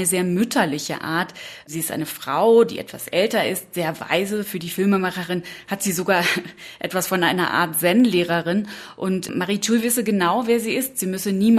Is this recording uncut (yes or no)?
yes